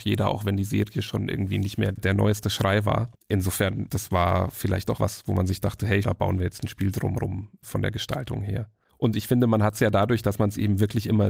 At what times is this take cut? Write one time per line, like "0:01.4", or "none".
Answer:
0:05.0
0:06.0